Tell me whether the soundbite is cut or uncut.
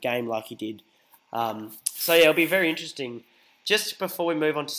uncut